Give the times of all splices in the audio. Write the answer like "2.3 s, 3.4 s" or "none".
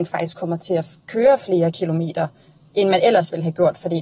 none

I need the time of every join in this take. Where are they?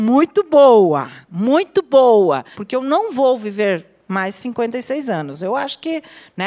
2.5 s

